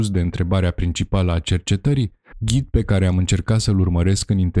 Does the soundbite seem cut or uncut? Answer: cut